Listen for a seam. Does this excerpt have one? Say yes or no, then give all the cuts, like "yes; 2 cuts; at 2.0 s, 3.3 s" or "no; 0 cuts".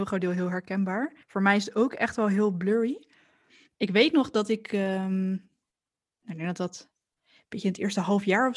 yes; 1 cut; at 1.2 s